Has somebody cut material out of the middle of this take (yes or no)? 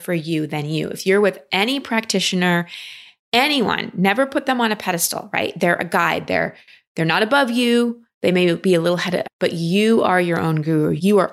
yes